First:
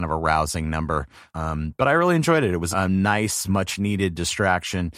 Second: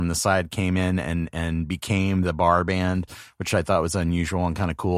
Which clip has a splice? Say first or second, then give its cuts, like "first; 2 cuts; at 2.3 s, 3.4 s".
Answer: first; 2 cuts; at 1.3 s, 2.7 s